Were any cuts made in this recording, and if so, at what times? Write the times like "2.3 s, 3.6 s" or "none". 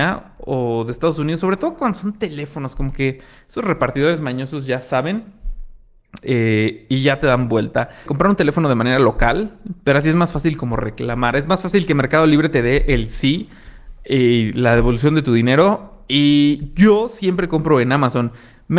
8.1 s